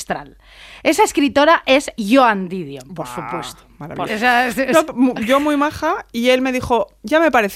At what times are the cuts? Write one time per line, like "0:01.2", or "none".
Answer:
0:04.1